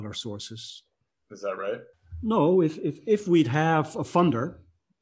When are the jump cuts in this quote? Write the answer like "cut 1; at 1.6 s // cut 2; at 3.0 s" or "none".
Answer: cut 1; at 1.1 s